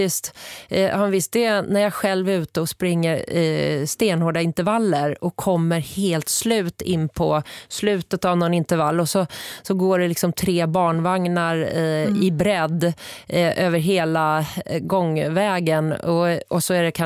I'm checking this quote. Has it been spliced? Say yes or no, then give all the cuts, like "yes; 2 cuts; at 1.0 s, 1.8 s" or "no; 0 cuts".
no; 0 cuts